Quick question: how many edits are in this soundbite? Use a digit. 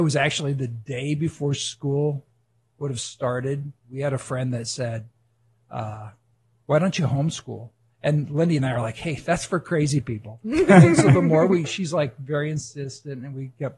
0